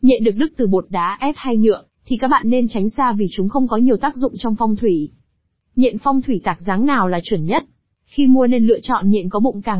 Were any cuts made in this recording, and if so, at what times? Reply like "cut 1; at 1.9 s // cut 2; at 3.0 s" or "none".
cut 1; at 7.9 s